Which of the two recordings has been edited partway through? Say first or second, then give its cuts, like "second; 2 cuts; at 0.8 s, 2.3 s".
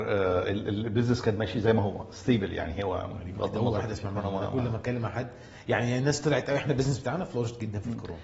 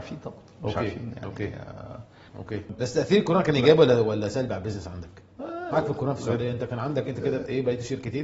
second; 2 cuts; at 2.3 s, 5.7 s